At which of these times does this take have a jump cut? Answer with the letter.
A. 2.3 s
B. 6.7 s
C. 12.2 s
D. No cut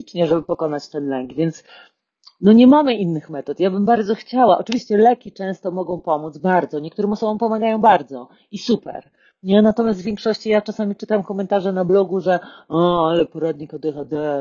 D